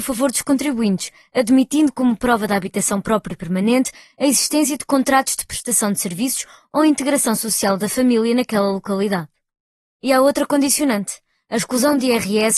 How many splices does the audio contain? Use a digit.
1